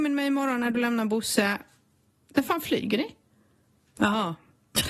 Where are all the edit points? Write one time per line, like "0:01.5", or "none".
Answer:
0:03.9